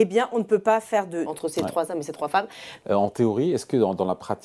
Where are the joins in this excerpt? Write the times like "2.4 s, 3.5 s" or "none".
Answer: 1.3 s, 2.8 s